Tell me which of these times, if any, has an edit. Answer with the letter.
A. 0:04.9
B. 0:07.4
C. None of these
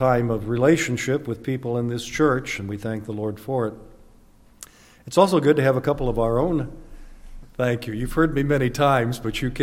B